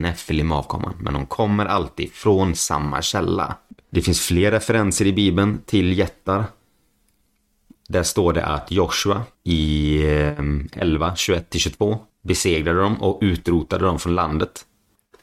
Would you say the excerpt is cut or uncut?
cut